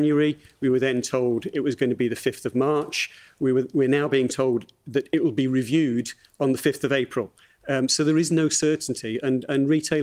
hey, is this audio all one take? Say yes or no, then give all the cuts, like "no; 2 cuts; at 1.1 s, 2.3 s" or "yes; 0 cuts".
yes; 0 cuts